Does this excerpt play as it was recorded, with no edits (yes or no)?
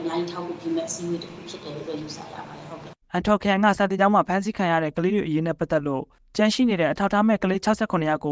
no